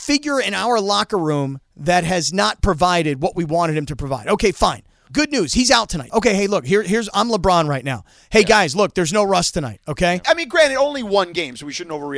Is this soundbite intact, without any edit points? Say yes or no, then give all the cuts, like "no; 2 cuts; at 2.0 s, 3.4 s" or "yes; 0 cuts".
no; 3 cuts; at 5.1 s, 6.1 s, 10.2 s